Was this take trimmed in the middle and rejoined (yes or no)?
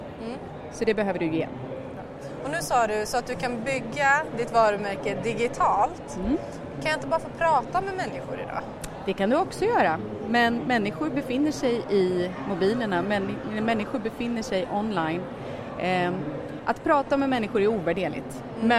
no